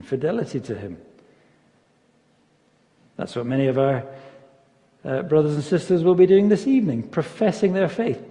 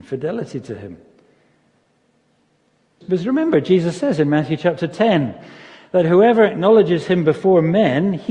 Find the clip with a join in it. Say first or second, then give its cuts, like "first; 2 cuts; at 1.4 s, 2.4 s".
second; 1 cut; at 3.0 s